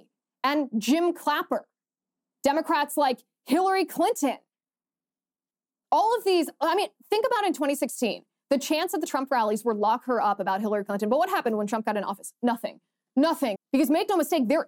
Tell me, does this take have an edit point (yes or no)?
yes